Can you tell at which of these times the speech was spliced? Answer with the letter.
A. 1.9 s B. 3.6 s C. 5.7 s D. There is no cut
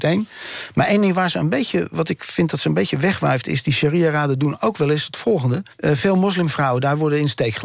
C